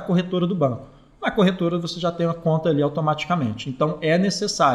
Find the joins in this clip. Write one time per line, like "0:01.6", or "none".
none